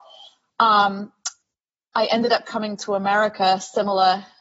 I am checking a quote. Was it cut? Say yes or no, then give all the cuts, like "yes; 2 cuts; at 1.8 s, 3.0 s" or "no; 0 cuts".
no; 0 cuts